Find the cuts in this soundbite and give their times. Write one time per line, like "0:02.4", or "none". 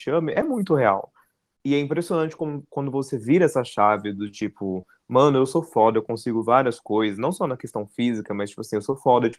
0:01.6